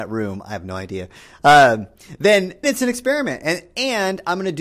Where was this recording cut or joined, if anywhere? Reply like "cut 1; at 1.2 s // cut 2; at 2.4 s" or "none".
cut 1; at 2.6 s